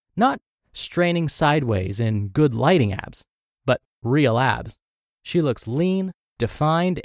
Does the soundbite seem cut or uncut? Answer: uncut